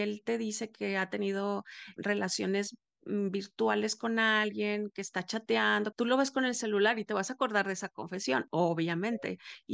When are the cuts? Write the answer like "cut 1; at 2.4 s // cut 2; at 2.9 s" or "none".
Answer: cut 1; at 2.0 s // cut 2; at 5.9 s